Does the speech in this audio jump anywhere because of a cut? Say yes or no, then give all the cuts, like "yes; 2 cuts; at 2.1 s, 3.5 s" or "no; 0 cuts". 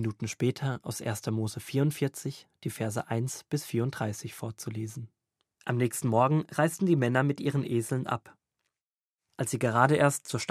yes; 1 cut; at 5.6 s